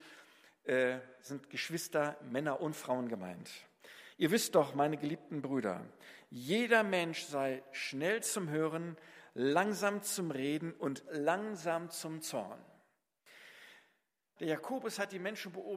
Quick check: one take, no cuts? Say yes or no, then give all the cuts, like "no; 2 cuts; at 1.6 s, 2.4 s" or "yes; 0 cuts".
no; 1 cut; at 14.4 s